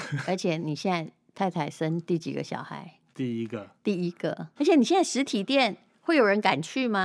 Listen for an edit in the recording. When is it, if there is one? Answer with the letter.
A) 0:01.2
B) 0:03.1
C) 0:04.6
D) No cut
C